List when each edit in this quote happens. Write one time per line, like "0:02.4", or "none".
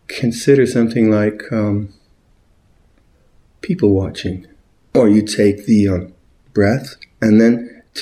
0:04.8